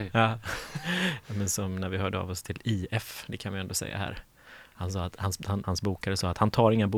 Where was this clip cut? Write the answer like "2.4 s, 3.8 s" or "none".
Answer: 5.6 s